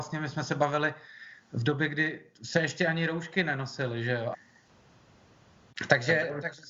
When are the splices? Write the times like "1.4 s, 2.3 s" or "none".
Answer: 4.3 s